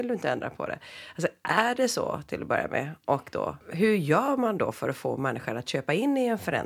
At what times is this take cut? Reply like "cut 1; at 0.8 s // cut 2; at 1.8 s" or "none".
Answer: cut 1; at 3.6 s